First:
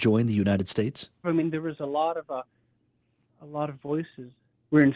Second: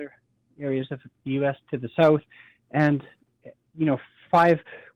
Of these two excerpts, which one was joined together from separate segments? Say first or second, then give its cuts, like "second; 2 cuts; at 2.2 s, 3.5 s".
first; 1 cut; at 1.2 s